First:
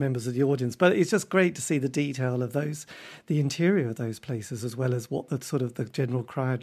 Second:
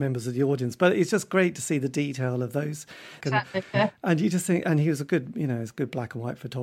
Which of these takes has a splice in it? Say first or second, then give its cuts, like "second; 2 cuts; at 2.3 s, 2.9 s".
second; 2 cuts; at 3.2 s, 4.6 s